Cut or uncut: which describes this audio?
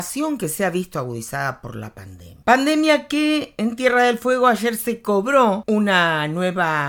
cut